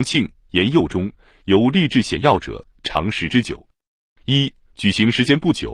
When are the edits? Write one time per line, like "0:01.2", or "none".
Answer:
0:01.3
0:04.2